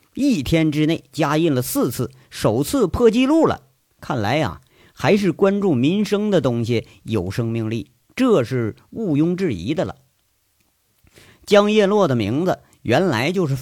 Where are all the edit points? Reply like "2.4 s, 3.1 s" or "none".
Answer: none

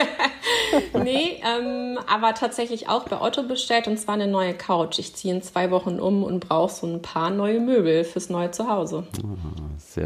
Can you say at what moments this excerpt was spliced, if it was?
none

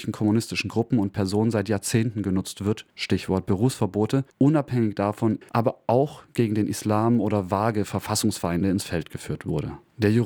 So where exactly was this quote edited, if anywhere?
5.4 s

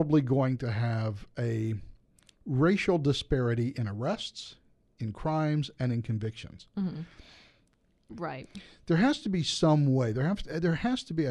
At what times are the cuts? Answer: 8.1 s

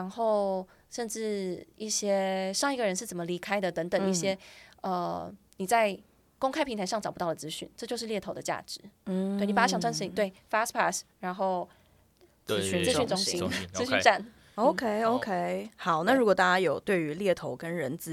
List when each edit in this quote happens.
none

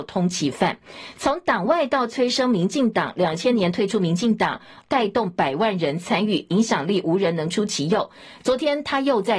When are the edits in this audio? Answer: 4.8 s

